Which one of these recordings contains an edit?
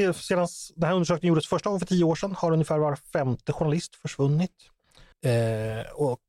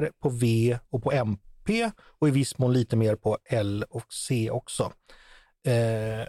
first; 1 cut; at 5.1 s

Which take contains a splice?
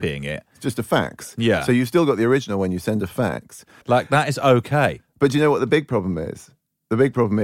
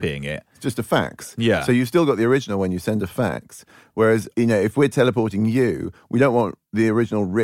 first; 1 cut; at 3.8 s

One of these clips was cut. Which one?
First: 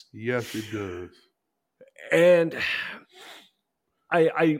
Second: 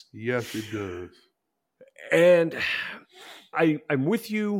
second; 1 cut; at 3.5 s

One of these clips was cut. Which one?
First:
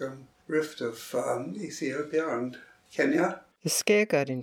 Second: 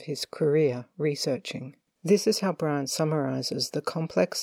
first; 1 cut; at 3.5 s

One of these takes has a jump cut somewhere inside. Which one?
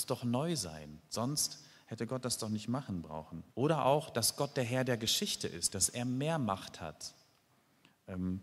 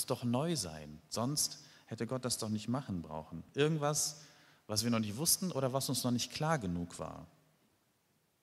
first; 2 cuts; at 3.5 s, 5.7 s

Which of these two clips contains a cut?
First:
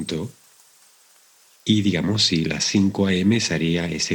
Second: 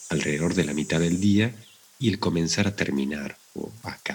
first; 1 cut; at 1.6 s

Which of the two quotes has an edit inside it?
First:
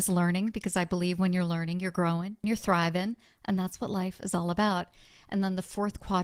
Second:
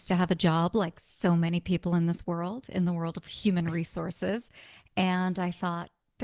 first; 1 cut; at 2.4 s

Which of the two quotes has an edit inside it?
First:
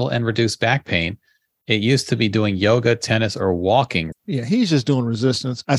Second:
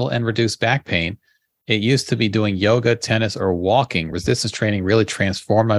first; 1 cut; at 4.1 s

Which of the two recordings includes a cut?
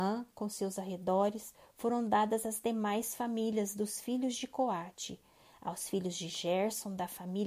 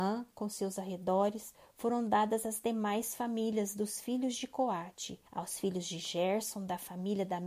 second; 1 cut; at 5.3 s

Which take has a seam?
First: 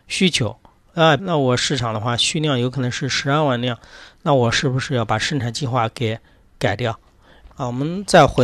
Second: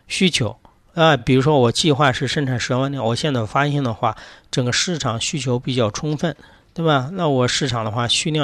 first; 2 cuts; at 1.2 s, 7.5 s

